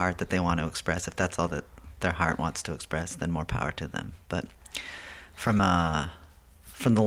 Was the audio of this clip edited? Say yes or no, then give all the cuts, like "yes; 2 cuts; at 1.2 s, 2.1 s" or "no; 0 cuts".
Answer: no; 0 cuts